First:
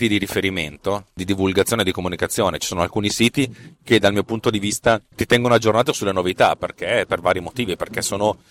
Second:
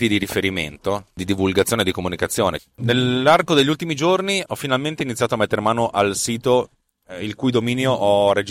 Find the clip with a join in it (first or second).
second